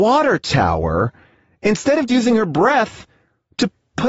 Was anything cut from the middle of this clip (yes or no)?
yes